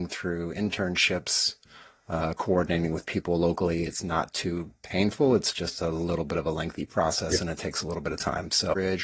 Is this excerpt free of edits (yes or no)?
no